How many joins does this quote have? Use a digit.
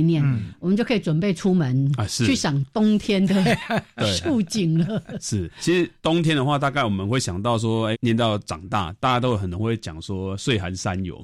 2